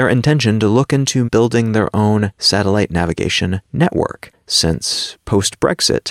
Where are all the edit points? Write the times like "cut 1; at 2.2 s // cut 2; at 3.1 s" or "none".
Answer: cut 1; at 1.2 s